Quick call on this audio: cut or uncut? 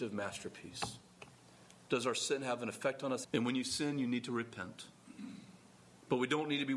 cut